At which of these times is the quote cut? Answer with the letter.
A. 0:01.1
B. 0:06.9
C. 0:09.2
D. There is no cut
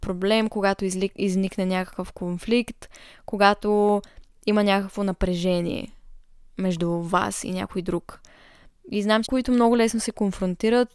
C